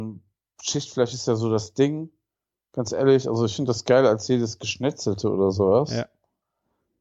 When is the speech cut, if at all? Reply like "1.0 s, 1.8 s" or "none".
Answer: none